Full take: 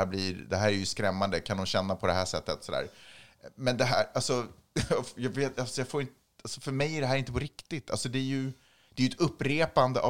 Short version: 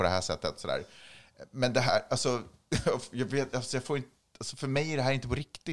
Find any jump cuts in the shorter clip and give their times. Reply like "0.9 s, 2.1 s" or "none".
none